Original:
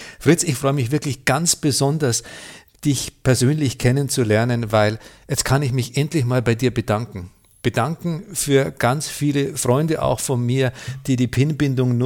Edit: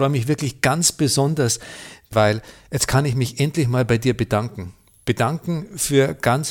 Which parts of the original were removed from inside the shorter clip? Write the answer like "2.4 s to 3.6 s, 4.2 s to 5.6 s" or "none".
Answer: 2.8 s to 4.7 s